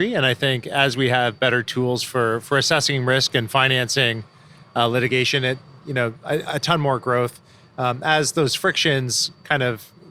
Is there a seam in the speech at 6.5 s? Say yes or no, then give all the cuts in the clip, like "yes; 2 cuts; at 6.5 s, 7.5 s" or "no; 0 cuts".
yes; 1 cut; at 6.5 s